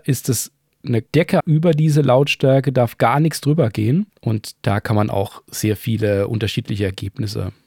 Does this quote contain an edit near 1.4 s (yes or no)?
yes